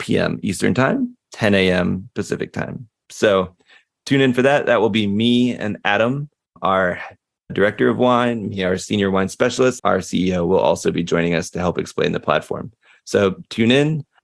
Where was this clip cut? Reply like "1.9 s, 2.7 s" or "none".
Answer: 9.8 s